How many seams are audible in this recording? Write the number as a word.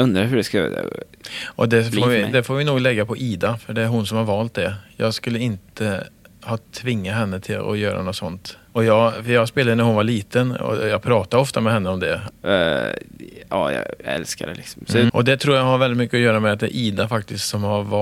three